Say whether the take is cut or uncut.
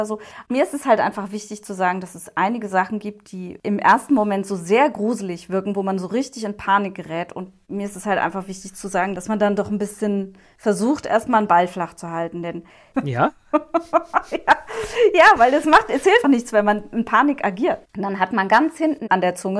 cut